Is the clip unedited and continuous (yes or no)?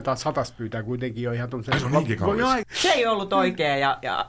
no